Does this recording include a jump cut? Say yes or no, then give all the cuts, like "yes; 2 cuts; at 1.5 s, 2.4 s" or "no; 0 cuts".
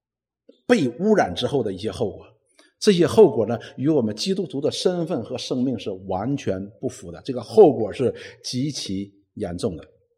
no; 0 cuts